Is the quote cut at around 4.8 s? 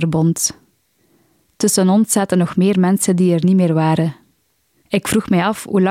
yes; 1 cut; at 4.8 s

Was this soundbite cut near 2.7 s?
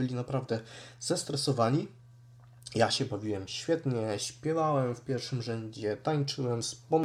no; 0 cuts

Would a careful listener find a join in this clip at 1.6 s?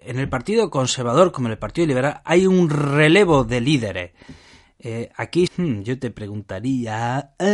no; 1 cut; at 5.5 s

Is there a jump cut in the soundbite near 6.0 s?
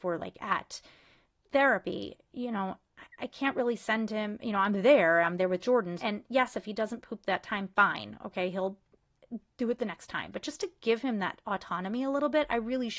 yes; 1 cut; at 6.0 s

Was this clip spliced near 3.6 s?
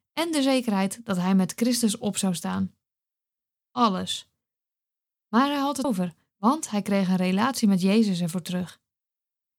yes; 2 cuts; at 3.6 s, 5.8 s

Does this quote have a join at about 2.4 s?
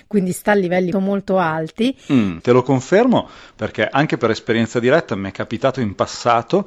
yes; 2 cuts; at 0.9 s, 2.4 s

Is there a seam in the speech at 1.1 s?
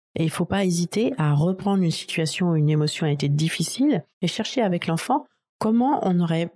no; 1 cut; at 4.1 s

